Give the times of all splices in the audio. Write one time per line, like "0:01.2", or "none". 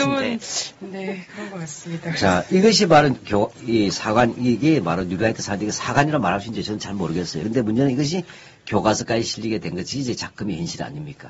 0:03.5
0:07.4